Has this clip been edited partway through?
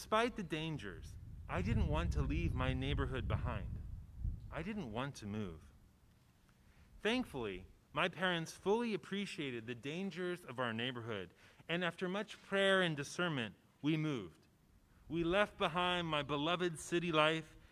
no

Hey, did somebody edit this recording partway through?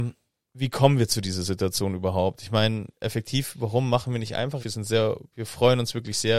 yes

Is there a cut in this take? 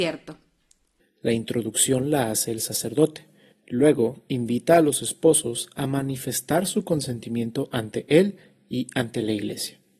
yes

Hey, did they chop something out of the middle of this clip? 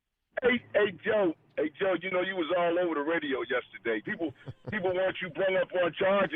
yes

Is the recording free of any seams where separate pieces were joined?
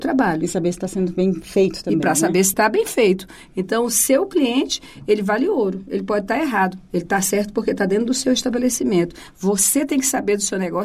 yes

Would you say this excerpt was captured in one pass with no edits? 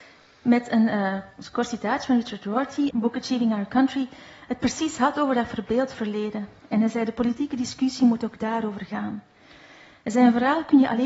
no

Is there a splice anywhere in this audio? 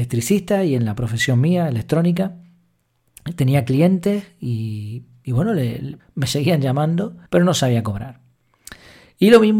yes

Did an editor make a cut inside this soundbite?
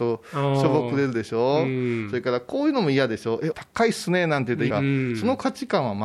yes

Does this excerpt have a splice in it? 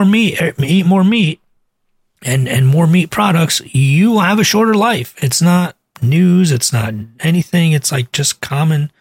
no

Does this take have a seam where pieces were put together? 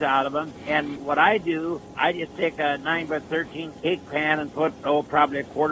no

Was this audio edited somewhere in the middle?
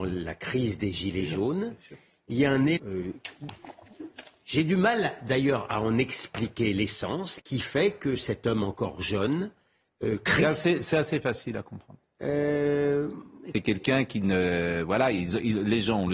yes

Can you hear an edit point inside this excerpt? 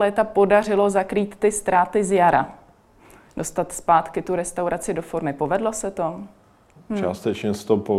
yes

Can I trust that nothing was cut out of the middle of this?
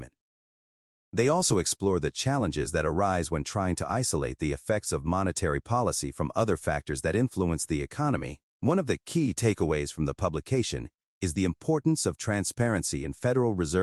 no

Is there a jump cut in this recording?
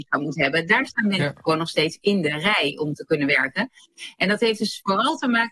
no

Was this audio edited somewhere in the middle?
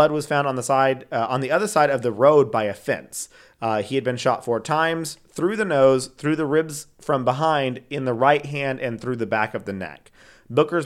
no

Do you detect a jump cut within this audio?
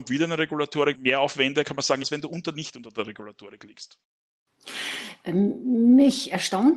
yes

